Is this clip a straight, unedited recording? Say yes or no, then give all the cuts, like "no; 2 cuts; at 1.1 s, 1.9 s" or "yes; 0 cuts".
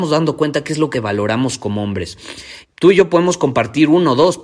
no; 2 cuts; at 0.9 s, 2.6 s